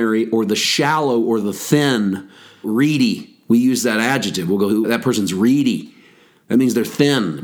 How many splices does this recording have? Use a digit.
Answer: 2